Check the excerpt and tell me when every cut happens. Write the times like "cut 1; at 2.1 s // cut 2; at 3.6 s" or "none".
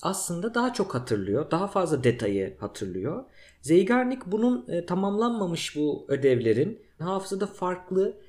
cut 1; at 7.0 s